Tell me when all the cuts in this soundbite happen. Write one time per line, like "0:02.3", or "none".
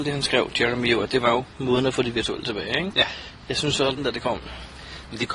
0:04.0